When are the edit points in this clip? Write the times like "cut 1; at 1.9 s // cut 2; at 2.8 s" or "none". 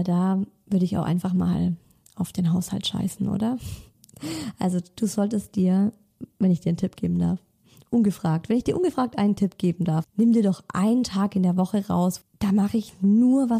cut 1; at 10.0 s // cut 2; at 12.2 s